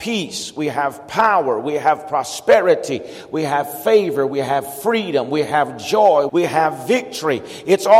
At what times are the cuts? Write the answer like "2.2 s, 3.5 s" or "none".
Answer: 6.3 s